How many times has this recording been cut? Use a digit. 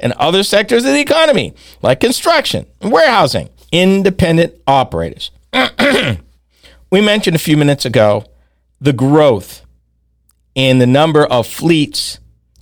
1